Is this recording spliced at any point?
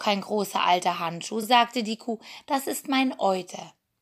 no; 0 cuts

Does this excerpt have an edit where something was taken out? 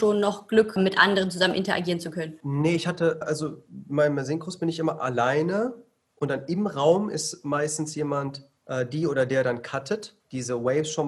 yes; 1 cut; at 3.2 s

